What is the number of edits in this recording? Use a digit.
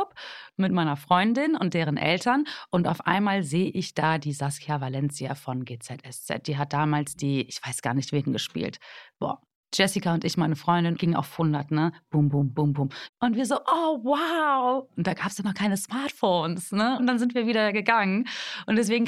3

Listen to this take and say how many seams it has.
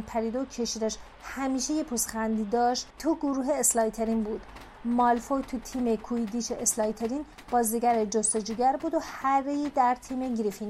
1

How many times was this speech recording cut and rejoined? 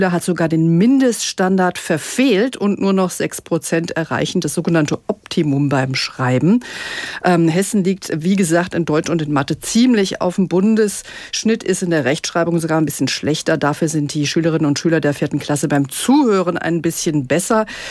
0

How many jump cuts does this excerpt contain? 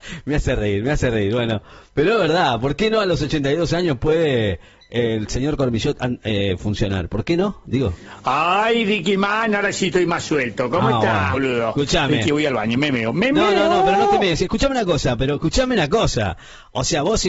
1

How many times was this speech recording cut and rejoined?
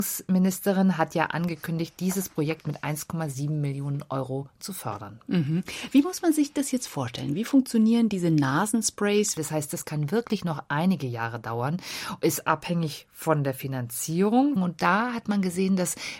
2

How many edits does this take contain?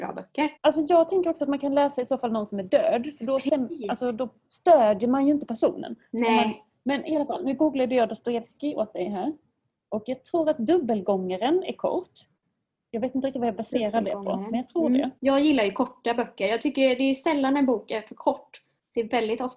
0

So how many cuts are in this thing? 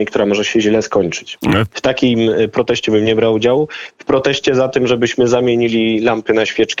1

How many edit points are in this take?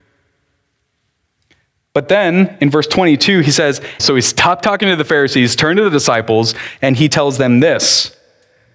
1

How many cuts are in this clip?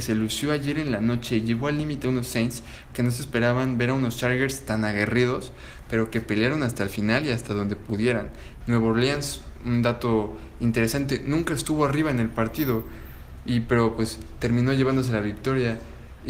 1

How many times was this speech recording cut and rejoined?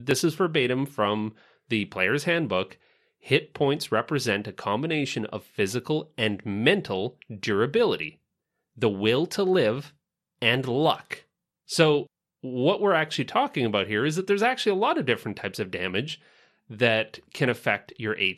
1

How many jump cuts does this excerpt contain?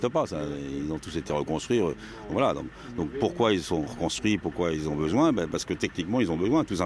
0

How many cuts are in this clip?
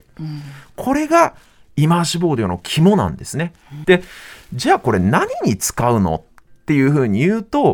1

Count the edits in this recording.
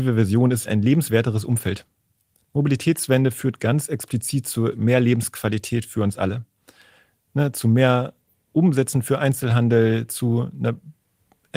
0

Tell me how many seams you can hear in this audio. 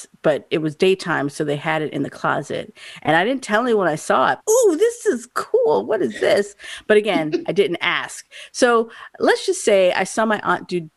1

